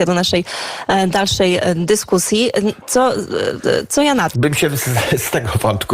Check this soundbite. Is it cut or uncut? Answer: cut